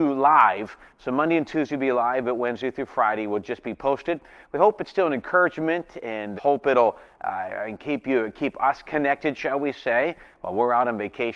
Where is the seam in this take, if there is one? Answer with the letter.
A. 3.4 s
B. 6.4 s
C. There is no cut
B